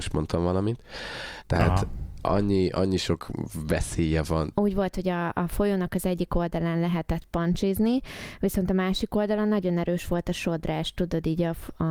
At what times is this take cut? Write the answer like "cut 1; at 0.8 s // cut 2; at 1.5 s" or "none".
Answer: cut 1; at 1.4 s // cut 2; at 4.5 s